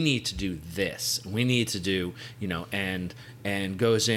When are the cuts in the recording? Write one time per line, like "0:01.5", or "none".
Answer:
none